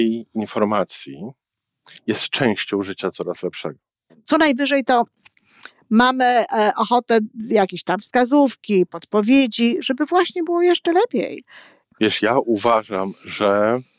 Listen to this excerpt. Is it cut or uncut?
cut